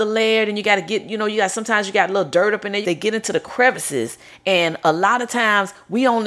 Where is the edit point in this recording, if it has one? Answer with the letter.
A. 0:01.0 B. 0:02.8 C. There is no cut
B